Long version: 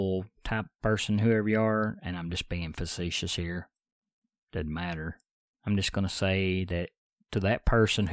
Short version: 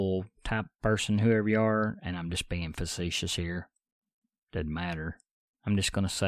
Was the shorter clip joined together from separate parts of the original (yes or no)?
no